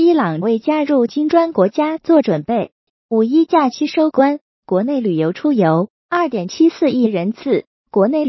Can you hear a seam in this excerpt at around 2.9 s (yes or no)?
yes